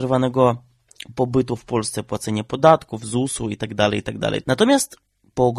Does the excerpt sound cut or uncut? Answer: cut